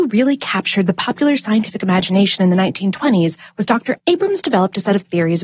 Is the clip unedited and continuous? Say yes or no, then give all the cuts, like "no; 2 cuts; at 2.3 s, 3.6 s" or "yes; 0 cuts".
no; 1 cut; at 4.0 s